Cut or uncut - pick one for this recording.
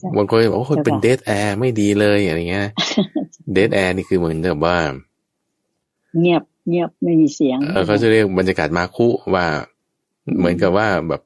cut